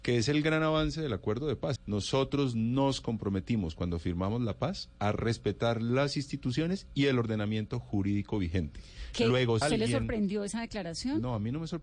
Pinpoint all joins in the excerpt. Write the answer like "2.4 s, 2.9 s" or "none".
1.8 s, 9.6 s